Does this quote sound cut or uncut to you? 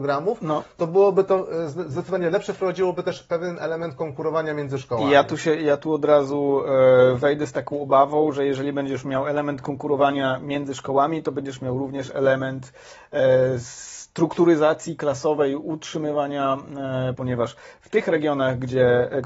cut